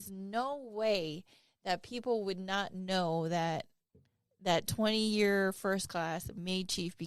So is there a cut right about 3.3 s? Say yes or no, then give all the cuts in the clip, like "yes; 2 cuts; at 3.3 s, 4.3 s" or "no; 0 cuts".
no; 0 cuts